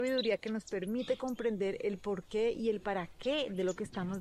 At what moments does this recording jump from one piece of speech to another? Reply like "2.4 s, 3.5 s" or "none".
none